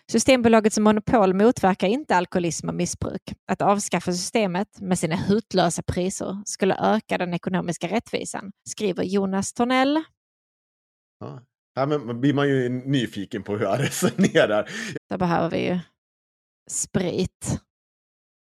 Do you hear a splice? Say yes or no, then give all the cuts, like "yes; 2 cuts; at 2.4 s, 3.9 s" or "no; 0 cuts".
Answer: yes; 2 cuts; at 8.6 s, 14.9 s